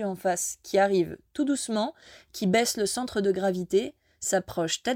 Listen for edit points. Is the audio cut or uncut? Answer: uncut